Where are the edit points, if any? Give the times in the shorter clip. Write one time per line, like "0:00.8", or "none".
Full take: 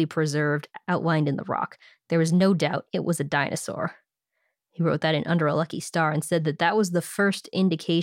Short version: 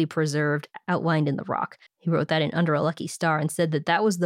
0:01.9